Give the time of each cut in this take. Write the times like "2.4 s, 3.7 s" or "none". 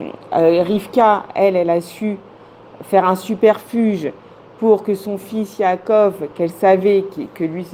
none